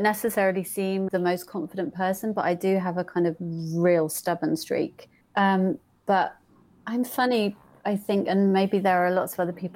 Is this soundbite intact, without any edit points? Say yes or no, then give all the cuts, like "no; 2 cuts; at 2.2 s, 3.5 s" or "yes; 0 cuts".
no; 2 cuts; at 1.1 s, 5.2 s